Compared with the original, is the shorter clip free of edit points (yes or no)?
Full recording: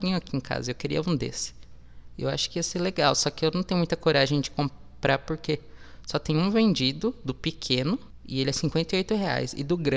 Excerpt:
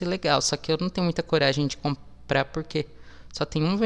yes